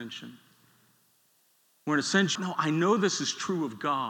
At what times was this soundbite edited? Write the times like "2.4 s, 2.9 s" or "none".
2.4 s